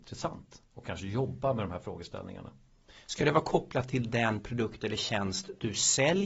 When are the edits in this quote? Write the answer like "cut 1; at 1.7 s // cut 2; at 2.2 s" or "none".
none